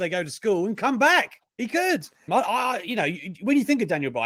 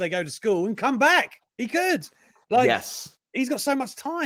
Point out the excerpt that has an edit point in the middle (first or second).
first